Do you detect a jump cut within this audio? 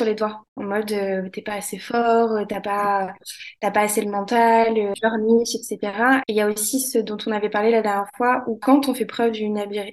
yes; 1 cut; at 6.2 s

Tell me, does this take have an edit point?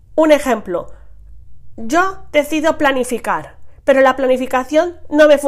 no; 0 cuts

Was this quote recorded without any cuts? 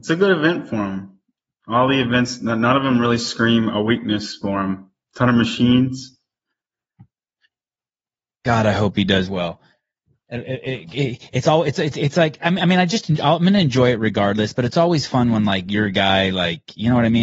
yes; 0 cuts

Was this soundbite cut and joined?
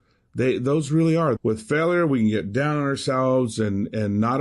yes; 1 cut; at 1.4 s

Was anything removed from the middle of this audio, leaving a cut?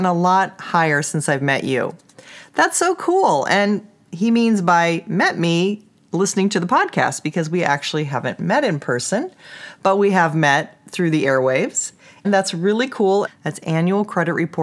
yes; 2 cuts; at 12.2 s, 13.3 s

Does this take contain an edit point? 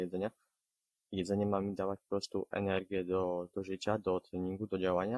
no; 0 cuts

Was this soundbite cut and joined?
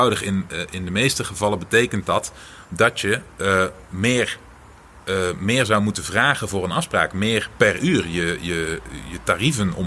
no; 0 cuts

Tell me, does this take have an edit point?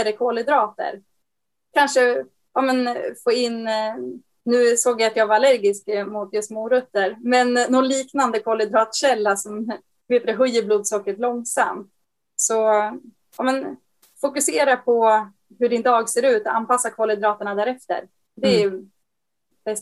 no; 0 cuts

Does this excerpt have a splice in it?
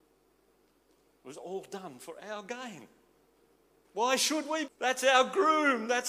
yes; 1 cut; at 4.7 s

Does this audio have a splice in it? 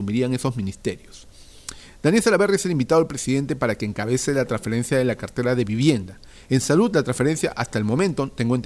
no; 0 cuts

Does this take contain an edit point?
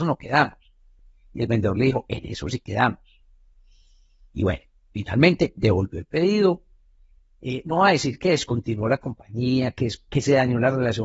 no; 0 cuts

